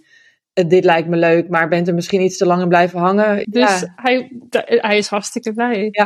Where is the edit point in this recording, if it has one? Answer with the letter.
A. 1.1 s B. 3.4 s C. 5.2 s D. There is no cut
B